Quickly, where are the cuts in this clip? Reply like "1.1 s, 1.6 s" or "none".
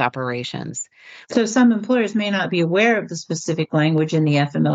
1.2 s